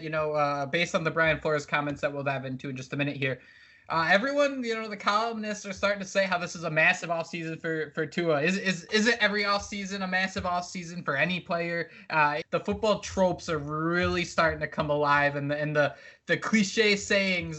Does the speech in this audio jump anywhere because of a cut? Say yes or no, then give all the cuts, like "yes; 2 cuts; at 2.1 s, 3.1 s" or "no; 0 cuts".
yes; 1 cut; at 12.4 s